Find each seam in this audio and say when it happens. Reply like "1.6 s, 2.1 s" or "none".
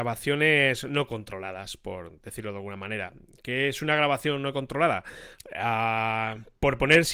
5.4 s

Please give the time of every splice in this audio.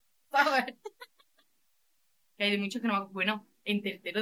2.2 s

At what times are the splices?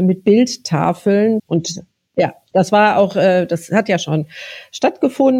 1.4 s

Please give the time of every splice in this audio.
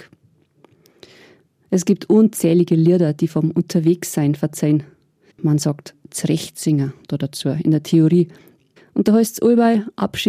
5.3 s, 8.8 s

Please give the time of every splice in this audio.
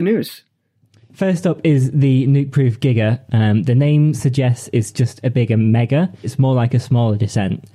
3.3 s, 6.2 s

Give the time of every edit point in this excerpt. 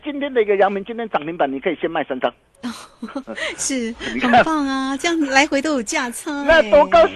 3.2 s

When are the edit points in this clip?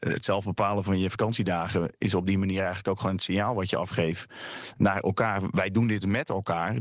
none

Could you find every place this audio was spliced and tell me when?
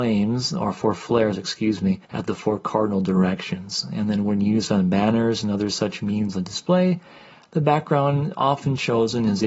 2.0 s

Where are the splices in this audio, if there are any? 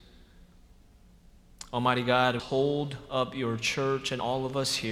2.4 s

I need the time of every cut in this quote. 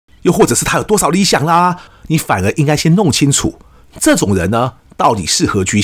1.9 s

